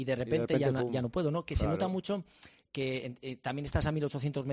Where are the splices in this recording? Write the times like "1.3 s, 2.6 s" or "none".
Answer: none